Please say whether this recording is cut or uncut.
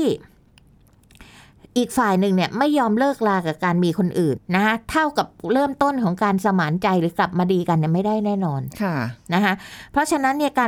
cut